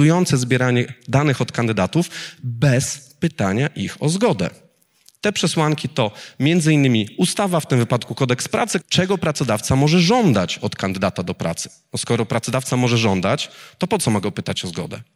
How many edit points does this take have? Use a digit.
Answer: 1